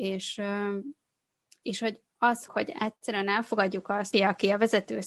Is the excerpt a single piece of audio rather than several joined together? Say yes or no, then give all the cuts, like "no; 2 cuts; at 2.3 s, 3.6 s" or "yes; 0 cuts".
no; 2 cuts; at 2.5 s, 4.1 s